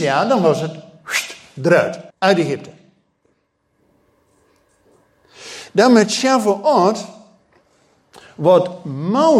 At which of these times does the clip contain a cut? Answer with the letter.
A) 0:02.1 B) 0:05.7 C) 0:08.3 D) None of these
A